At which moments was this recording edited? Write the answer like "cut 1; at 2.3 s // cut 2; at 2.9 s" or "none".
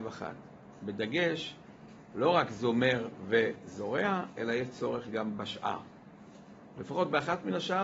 none